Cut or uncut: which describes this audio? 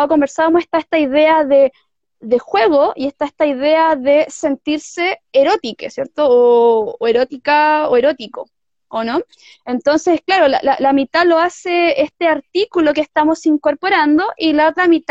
uncut